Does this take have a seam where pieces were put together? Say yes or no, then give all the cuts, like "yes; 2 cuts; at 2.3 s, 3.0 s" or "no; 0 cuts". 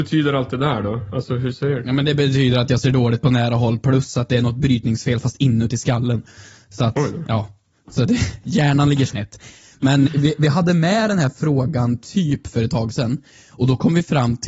yes; 1 cut; at 10.1 s